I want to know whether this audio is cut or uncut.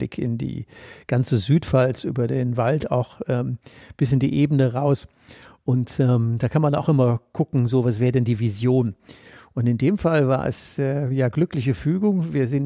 uncut